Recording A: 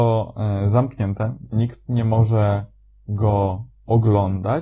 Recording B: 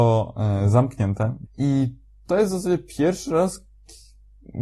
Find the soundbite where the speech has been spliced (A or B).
B